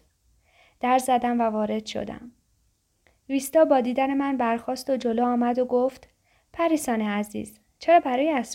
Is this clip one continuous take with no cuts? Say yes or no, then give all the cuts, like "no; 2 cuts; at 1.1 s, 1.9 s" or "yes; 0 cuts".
yes; 0 cuts